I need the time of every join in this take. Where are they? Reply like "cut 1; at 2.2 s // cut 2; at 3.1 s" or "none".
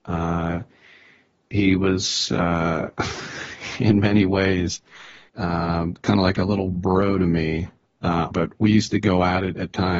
cut 1; at 5.3 s // cut 2; at 8.3 s